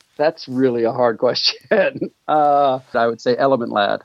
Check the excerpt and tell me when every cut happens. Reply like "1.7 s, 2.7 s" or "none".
2.9 s